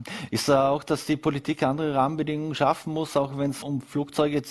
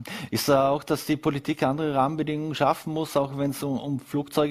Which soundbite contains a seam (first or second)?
first